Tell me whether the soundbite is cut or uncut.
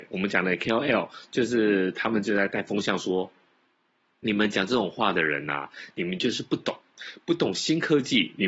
uncut